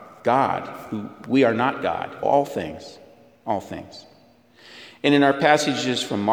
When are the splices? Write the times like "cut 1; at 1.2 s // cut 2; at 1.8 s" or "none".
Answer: cut 1; at 2.2 s